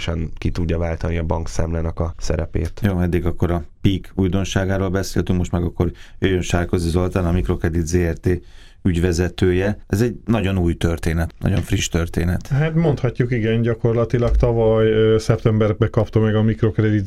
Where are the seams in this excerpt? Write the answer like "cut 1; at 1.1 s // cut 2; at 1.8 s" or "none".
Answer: none